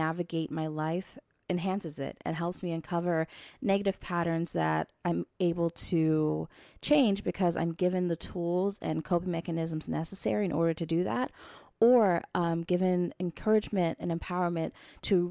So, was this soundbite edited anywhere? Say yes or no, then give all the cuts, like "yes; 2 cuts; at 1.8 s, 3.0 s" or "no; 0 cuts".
no; 0 cuts